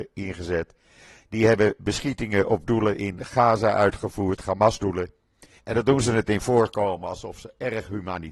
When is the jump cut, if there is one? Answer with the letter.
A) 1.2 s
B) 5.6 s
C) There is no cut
B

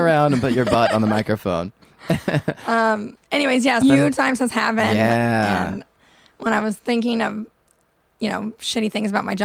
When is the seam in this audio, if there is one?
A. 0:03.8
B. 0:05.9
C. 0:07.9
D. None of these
A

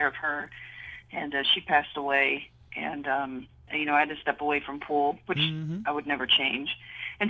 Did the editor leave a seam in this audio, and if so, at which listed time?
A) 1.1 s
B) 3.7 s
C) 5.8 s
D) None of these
B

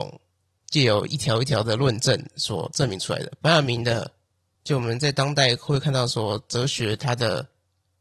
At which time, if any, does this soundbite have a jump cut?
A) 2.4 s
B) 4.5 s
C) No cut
B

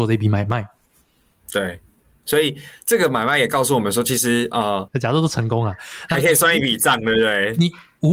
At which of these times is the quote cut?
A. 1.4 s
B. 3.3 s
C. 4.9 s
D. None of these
C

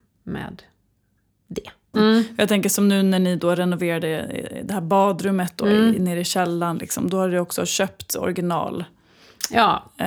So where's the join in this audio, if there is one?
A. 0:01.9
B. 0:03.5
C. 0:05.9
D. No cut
A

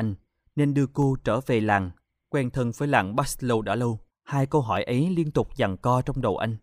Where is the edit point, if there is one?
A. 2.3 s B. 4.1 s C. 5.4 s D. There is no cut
B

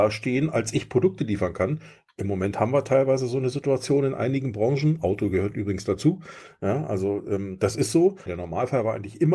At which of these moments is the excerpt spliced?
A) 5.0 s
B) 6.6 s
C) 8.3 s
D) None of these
C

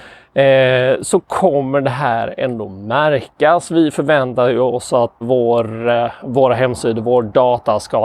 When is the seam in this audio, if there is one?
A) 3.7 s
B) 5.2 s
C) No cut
B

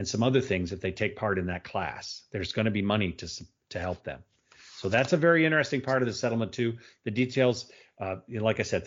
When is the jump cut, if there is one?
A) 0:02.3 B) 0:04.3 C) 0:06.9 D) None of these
D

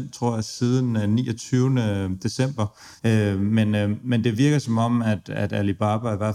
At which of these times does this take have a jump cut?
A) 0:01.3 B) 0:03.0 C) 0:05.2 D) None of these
B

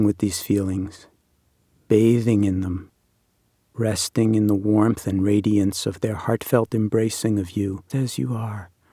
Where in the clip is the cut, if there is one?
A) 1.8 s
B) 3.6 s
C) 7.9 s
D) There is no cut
C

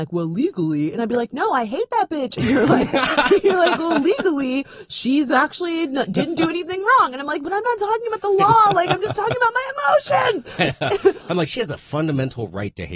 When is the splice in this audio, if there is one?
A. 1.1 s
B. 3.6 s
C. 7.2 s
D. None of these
D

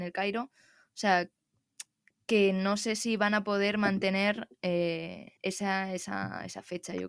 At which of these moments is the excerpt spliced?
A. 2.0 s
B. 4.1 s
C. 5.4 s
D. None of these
C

